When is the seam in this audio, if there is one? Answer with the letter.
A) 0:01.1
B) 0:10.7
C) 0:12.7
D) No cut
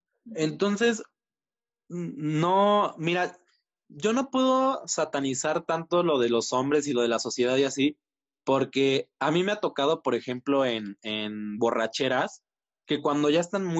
D